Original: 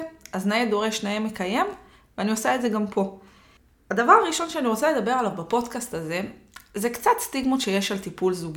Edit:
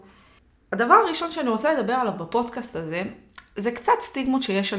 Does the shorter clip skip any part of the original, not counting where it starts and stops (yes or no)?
no